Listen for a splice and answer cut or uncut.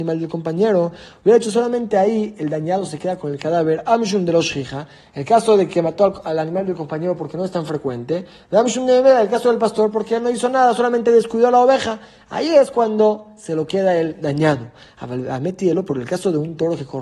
uncut